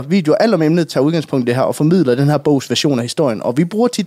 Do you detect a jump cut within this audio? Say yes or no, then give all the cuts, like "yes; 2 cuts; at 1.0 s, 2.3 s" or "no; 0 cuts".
no; 0 cuts